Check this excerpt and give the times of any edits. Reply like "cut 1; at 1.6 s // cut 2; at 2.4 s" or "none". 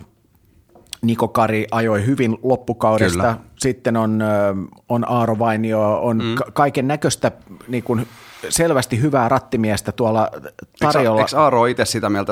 none